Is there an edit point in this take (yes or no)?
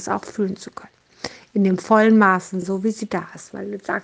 no